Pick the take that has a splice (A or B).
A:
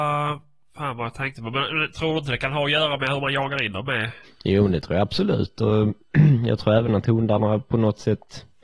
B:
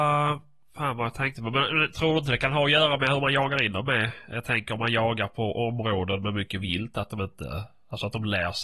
A